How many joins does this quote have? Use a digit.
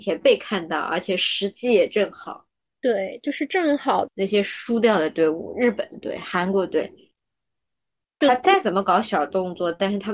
1